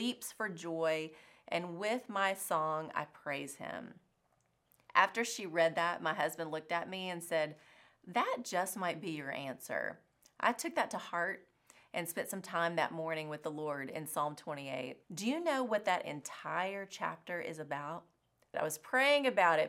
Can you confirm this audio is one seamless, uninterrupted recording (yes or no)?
no